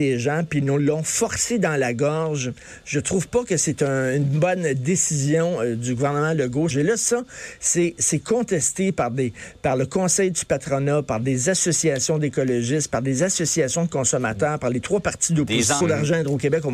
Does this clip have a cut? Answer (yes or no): yes